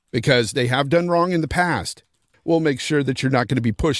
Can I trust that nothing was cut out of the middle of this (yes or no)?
no